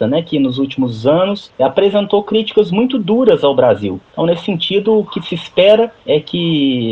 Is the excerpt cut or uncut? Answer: cut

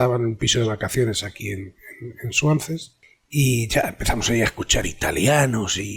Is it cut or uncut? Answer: uncut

